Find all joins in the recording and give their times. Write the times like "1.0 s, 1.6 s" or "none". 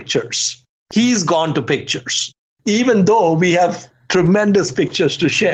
2.5 s